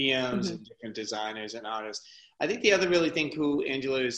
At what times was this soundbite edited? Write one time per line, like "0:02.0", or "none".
none